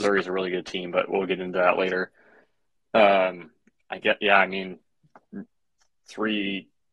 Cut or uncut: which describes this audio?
uncut